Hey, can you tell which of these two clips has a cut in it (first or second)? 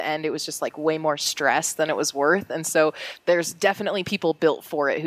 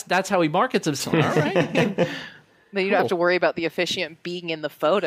second